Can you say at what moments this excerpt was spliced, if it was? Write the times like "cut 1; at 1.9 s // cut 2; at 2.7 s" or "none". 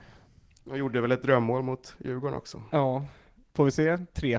cut 1; at 3.4 s